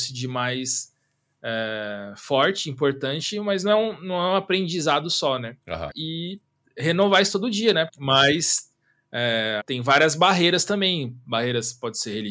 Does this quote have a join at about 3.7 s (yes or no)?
no